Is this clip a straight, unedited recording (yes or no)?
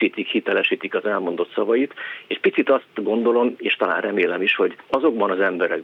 no